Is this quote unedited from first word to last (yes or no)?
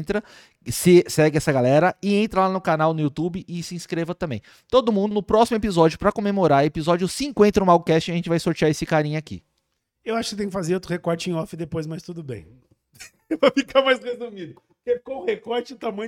no